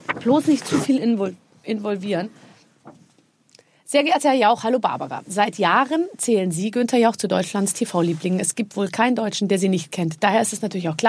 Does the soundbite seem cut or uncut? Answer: uncut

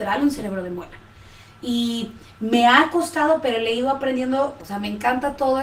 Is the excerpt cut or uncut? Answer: cut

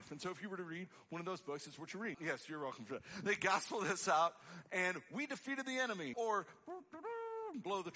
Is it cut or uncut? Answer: cut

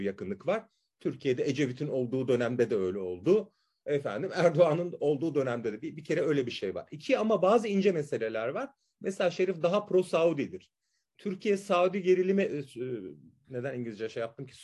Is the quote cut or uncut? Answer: uncut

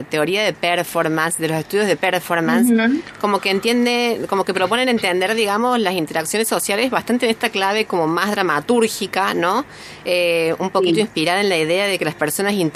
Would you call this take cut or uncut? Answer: uncut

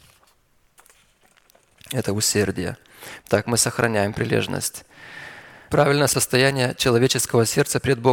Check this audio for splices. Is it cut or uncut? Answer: cut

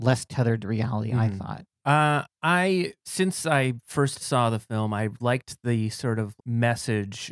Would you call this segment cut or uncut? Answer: cut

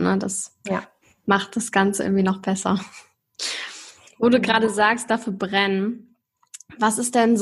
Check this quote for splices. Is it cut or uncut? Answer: uncut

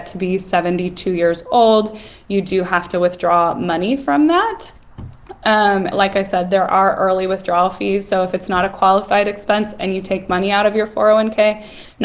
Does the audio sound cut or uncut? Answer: cut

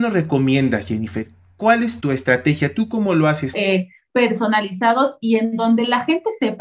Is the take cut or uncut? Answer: cut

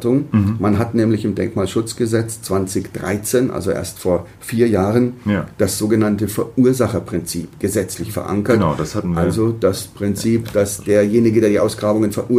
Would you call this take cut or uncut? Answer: uncut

